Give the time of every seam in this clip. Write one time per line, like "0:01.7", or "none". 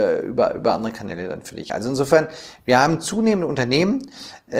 none